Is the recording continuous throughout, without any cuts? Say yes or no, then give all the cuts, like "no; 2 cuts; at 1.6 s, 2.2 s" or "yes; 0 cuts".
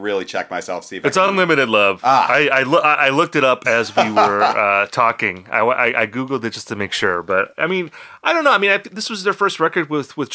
yes; 0 cuts